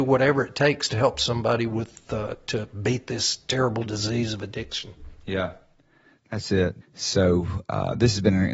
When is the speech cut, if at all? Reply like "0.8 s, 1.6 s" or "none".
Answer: 6.8 s